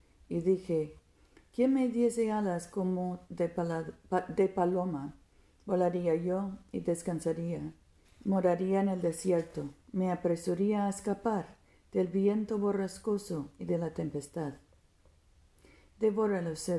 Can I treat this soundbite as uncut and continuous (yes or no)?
no